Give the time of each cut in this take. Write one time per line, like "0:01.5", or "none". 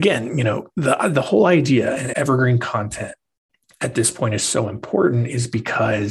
0:02.1